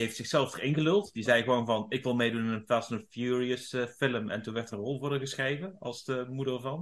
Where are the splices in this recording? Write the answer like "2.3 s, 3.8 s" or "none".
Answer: none